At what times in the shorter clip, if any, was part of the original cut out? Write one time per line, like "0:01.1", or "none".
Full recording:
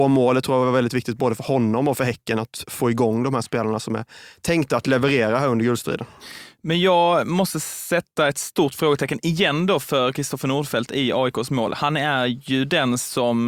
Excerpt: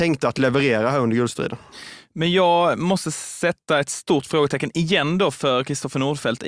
none